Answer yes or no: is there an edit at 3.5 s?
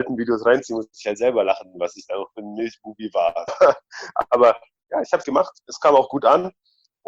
yes